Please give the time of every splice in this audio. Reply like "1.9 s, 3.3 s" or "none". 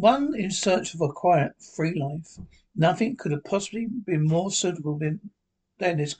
none